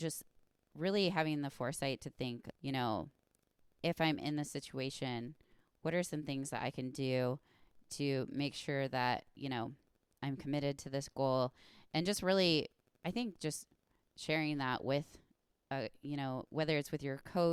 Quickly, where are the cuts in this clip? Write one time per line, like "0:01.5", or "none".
0:02.5